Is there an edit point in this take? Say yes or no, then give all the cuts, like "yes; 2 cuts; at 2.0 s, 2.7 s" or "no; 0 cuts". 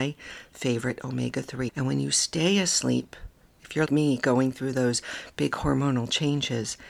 yes; 2 cuts; at 1.7 s, 3.9 s